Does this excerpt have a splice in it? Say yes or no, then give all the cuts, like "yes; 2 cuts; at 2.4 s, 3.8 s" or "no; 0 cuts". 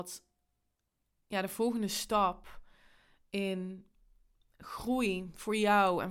no; 0 cuts